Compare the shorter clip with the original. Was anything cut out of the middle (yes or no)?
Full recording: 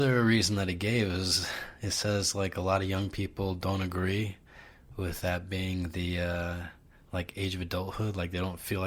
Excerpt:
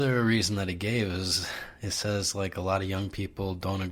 no